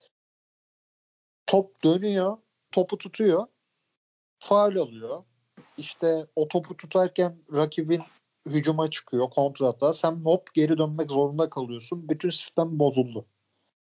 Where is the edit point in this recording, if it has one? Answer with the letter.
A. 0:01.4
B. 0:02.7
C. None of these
B